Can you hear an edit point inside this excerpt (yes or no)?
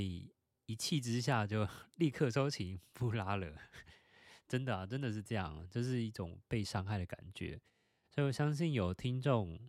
no